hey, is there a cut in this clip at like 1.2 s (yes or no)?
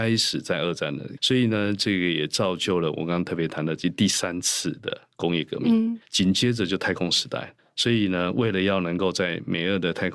yes